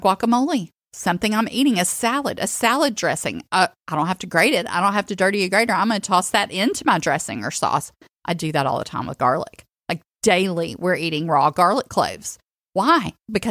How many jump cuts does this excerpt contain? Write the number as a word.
zero